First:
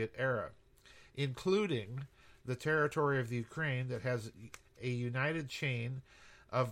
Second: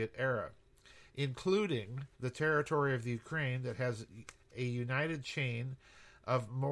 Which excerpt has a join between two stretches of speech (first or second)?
second